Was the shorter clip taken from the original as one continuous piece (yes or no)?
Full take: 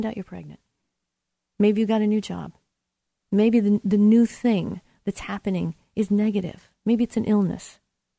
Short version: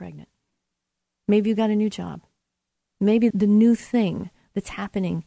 no